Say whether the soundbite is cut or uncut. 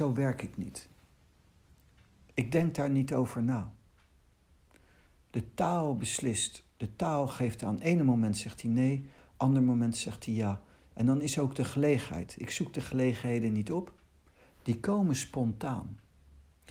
uncut